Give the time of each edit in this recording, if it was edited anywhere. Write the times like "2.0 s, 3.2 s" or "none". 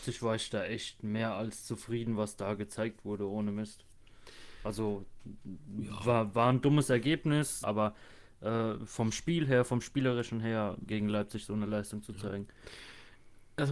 7.6 s, 8.9 s, 10.9 s

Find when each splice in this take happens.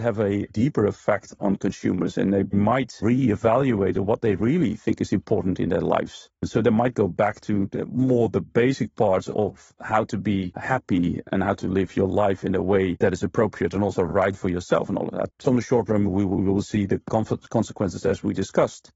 15.4 s

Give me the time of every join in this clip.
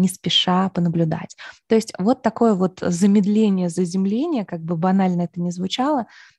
none

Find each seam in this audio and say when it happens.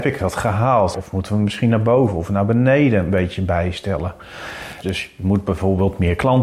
0.9 s, 4.8 s

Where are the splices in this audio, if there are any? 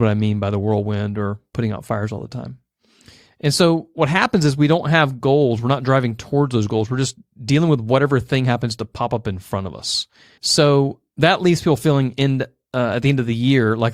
10.4 s

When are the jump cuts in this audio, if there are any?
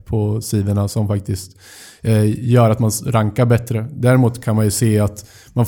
none

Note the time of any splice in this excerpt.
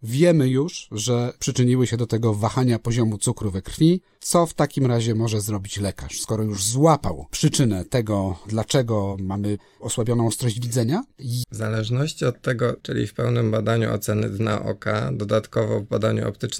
11.4 s, 12.8 s

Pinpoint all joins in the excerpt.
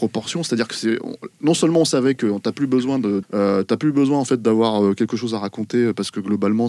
3.2 s

